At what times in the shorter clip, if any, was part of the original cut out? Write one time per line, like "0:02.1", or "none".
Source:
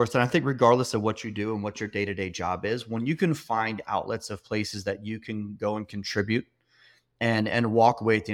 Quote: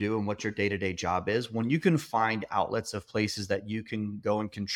none